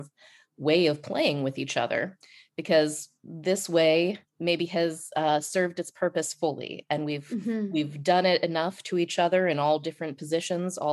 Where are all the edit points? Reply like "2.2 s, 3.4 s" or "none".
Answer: 4.3 s